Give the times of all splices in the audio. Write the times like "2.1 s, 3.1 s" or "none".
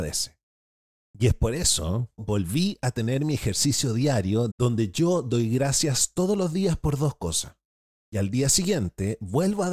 2.2 s, 4.5 s, 8.0 s